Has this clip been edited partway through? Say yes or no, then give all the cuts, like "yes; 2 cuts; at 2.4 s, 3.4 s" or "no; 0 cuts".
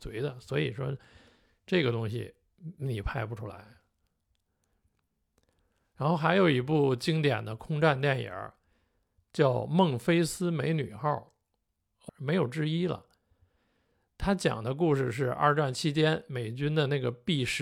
yes; 1 cut; at 12.1 s